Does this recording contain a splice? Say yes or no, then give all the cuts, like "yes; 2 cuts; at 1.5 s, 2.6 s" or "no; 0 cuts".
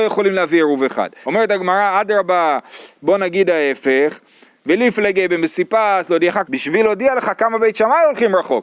yes; 2 cuts; at 1.2 s, 6.4 s